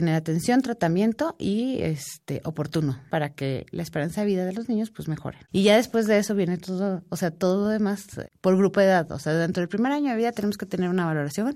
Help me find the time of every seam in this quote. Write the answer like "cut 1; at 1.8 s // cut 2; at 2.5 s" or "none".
none